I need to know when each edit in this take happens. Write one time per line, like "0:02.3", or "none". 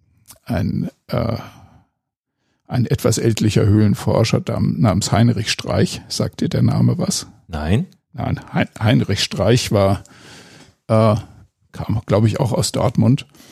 none